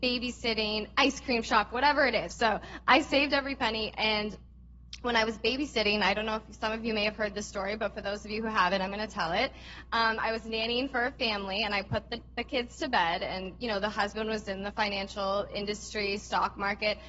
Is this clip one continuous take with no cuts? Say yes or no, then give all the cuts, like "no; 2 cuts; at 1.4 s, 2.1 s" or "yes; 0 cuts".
no; 1 cut; at 2.3 s